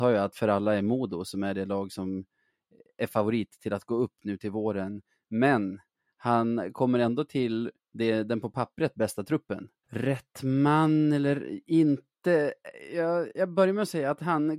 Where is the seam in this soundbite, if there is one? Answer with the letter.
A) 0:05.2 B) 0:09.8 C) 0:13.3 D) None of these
B